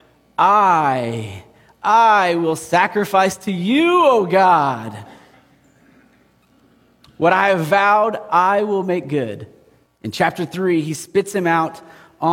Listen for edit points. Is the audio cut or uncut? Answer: cut